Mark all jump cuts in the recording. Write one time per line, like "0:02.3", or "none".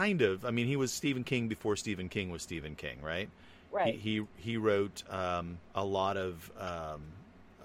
0:05.7

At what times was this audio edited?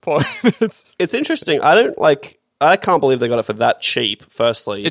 none

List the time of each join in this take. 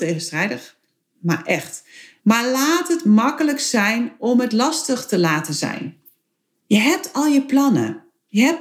0:02.2
0:06.5

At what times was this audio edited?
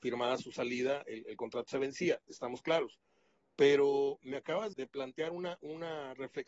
0:04.7

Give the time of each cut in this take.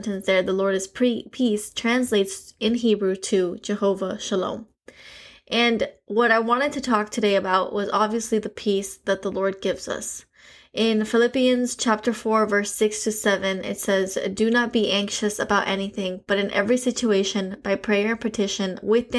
none

